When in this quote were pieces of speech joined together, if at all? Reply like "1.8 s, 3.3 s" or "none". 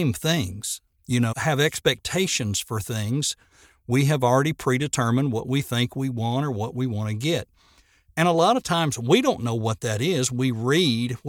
1.3 s